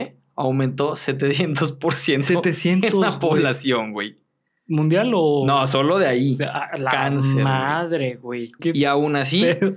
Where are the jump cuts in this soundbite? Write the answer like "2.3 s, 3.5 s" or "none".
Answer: 8.6 s